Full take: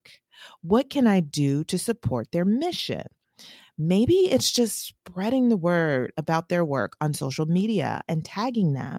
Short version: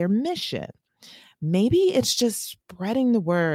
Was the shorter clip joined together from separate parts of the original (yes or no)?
no